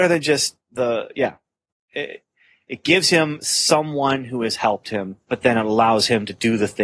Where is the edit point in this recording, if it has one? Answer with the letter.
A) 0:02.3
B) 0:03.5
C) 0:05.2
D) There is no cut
C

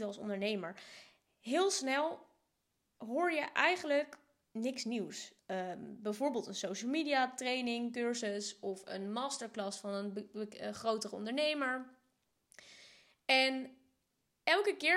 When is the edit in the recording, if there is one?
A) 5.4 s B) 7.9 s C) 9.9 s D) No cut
A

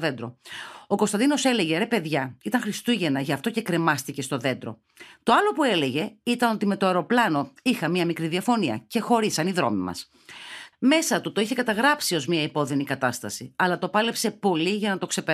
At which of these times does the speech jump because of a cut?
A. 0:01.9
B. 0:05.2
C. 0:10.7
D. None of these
C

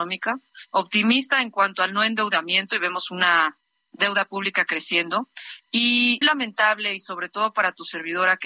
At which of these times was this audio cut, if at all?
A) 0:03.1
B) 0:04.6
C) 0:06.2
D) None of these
C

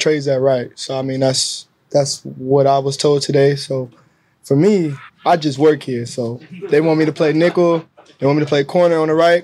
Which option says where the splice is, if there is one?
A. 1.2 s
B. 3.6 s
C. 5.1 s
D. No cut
C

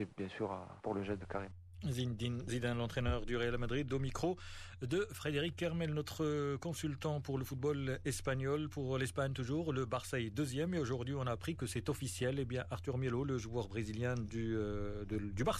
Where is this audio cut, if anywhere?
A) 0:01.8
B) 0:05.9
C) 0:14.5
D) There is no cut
D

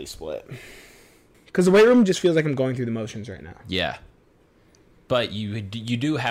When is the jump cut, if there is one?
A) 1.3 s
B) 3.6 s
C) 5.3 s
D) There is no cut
A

